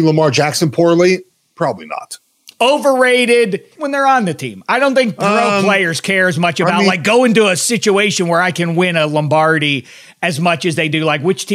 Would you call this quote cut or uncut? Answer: cut